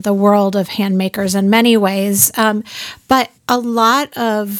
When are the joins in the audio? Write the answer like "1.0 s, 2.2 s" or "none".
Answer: 3.4 s